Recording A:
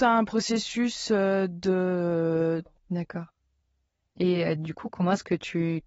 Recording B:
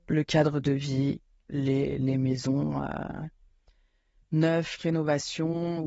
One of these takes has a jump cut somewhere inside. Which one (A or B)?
A